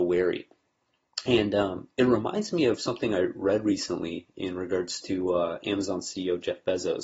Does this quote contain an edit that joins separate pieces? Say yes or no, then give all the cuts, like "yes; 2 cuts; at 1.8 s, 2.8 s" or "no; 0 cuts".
no; 0 cuts